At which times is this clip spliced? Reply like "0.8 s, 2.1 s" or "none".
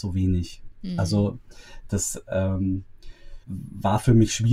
3.4 s